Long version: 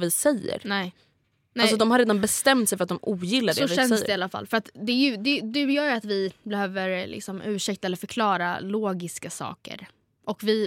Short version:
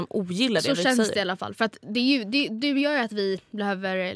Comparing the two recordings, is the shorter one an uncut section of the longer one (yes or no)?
yes